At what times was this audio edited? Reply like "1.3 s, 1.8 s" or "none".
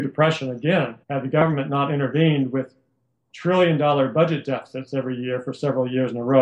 1.0 s